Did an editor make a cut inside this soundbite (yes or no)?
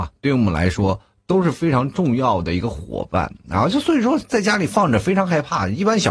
no